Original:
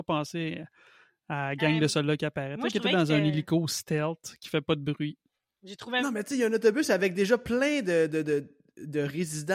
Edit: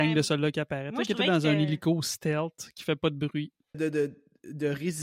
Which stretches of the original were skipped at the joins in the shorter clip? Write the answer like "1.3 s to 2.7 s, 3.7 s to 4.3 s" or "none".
5.4 s to 8.1 s